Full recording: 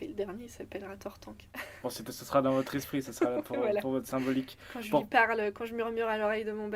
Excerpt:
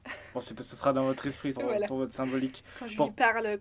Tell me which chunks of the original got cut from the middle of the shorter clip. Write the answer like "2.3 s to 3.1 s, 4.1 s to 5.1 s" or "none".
3.0 s to 3.5 s